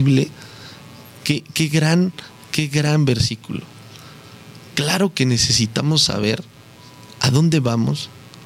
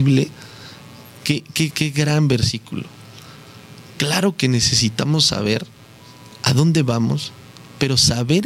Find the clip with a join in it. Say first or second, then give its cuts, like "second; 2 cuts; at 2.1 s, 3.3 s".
second; 1 cut; at 1.7 s